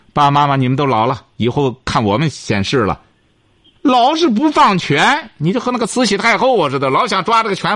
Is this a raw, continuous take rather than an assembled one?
yes; 0 cuts

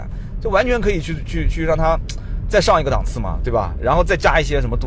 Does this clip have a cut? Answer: no; 0 cuts

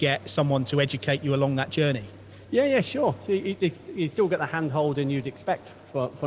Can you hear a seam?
no; 0 cuts

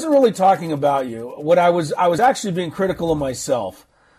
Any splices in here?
no; 0 cuts

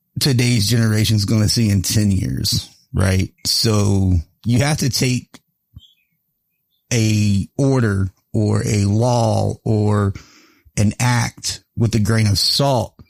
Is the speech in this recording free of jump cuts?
no; 1 cut; at 3.4 s

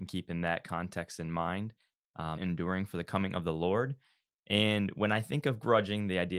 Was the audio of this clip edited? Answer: yes; 1 cut; at 2.4 s

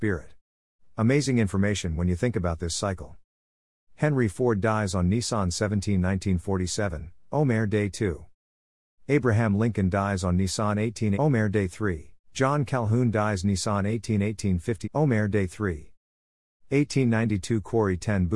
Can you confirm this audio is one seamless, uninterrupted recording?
no; 3 cuts; at 11.1 s, 12.2 s, 14.8 s

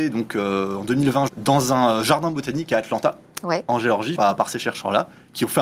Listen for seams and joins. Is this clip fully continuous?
no; 2 cuts; at 1.3 s, 4.1 s

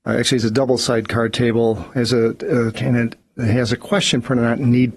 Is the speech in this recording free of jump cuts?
no; 1 cut; at 2.7 s

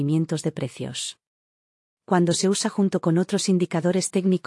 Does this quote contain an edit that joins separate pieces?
no; 0 cuts

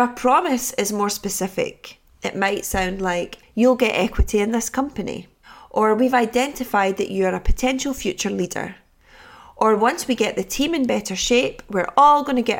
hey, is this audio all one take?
no; 1 cut; at 3.4 s

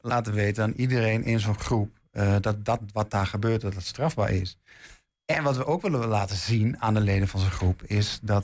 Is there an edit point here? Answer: yes; 1 cut; at 5.1 s

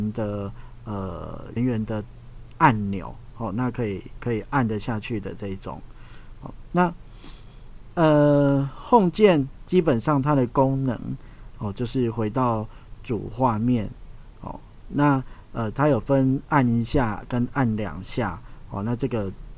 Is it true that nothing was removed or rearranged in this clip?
no; 1 cut; at 1.6 s

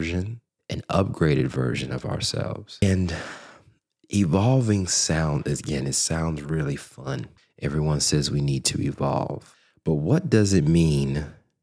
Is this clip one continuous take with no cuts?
yes; 0 cuts

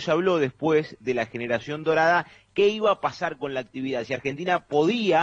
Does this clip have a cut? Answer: no; 0 cuts

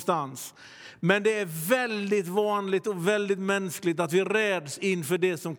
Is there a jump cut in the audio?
no; 0 cuts

